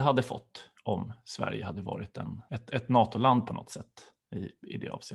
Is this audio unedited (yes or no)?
no